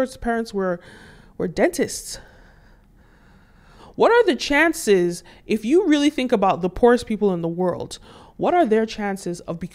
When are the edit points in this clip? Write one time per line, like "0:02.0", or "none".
none